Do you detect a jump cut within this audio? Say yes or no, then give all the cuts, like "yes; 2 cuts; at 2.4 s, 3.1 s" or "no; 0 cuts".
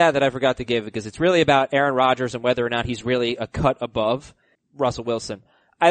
yes; 1 cut; at 4.5 s